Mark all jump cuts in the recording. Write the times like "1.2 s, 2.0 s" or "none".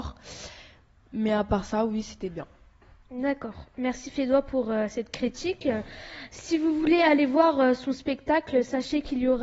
none